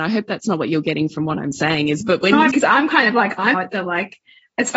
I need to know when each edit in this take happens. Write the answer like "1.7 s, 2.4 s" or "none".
2.5 s, 3.5 s